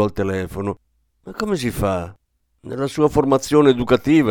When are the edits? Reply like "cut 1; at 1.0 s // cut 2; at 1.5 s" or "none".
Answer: cut 1; at 2.5 s